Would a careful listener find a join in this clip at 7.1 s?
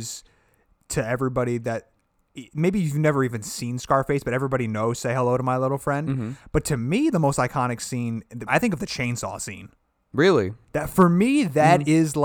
no; 1 cut; at 8.5 s

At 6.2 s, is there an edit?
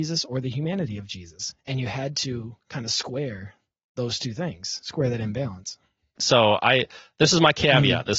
yes; 1 cut; at 6.2 s

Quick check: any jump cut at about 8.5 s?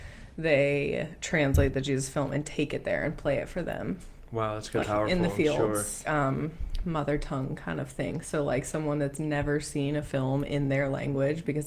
no; 2 cuts; at 4.8 s, 6.0 s

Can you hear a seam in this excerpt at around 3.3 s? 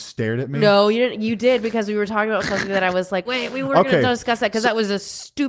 yes; 1 cut; at 3.3 s

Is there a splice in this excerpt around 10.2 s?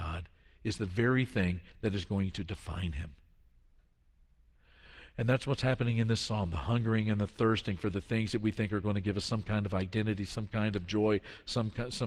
no; 0 cuts

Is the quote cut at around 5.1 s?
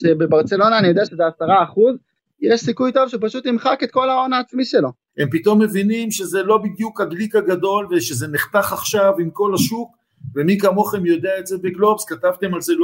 yes; 1 cut; at 5.1 s

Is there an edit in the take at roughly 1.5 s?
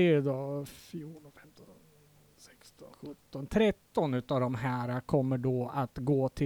no; 1 cut; at 2.9 s

